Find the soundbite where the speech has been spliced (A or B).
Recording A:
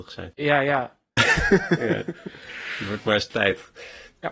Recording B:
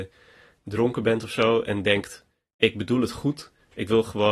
A